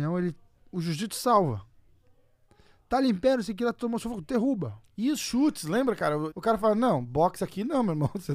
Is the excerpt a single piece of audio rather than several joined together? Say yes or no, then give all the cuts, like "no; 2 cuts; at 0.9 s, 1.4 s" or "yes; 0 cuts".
no; 1 cut; at 6.3 s